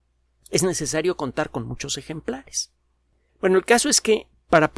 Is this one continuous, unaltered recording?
no; 1 cut; at 3.3 s

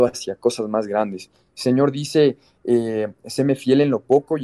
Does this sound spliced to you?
no; 0 cuts

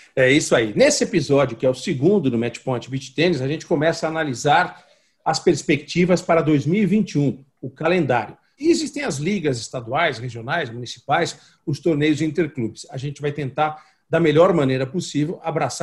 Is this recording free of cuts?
no; 1 cut; at 8.6 s

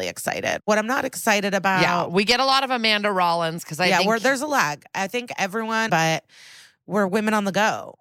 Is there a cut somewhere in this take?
yes; 1 cut; at 5.9 s

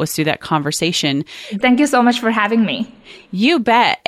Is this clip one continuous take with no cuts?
no; 1 cut; at 1.6 s

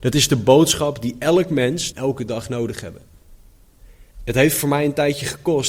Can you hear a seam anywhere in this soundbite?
yes; 2 cuts; at 1.9 s, 4.1 s

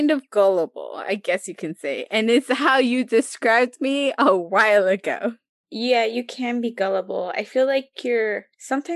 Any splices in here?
no; 0 cuts

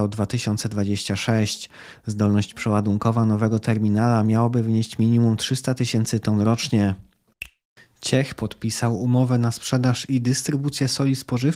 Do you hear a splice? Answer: no; 0 cuts

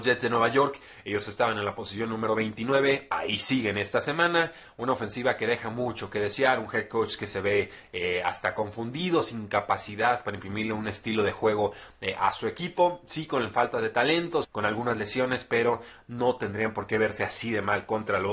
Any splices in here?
yes; 1 cut; at 14.4 s

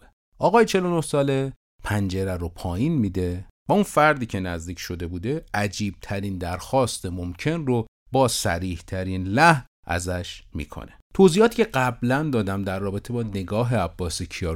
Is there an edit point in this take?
yes; 1 cut; at 11.0 s

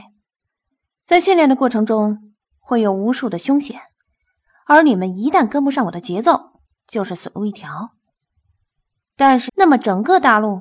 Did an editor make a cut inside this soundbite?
yes; 1 cut; at 9.5 s

